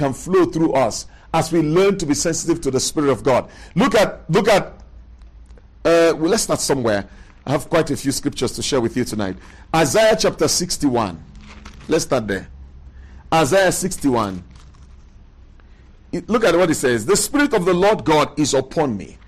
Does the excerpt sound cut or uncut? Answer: uncut